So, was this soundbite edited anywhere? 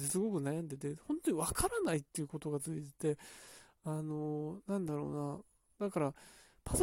no; 0 cuts

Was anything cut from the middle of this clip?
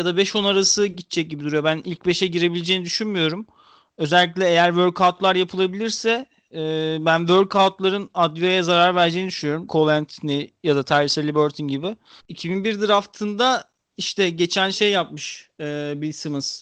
yes; 2 cuts; at 9.7 s, 12.2 s

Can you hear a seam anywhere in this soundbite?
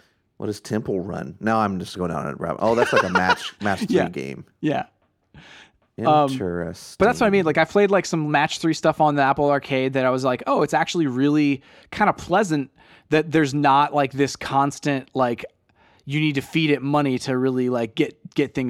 no; 0 cuts

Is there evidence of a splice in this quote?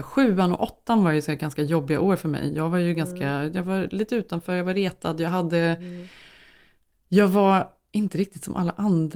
no; 0 cuts

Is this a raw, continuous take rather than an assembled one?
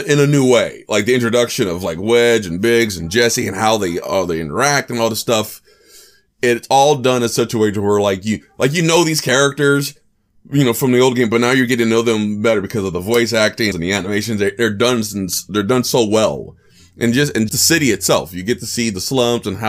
no; 2 cuts; at 13.7 s, 17.5 s

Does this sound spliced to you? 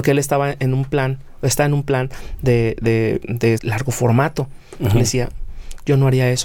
yes; 1 cut; at 3.6 s

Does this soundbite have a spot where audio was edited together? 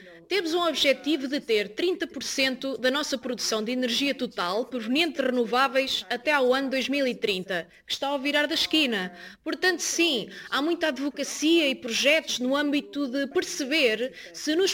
no; 0 cuts

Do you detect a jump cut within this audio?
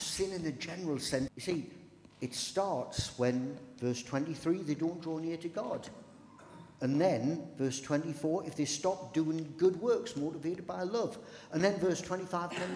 yes; 1 cut; at 1.3 s

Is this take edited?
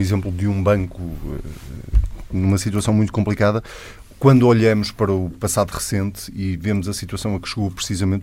no; 0 cuts

